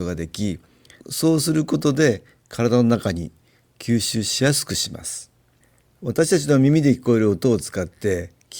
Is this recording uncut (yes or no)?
yes